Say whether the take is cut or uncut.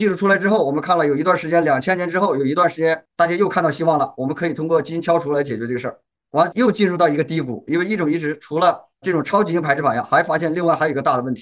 uncut